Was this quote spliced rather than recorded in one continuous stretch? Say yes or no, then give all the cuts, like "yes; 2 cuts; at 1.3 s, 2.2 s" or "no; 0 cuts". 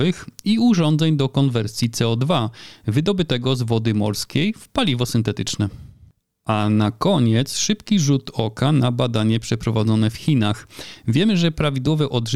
no; 0 cuts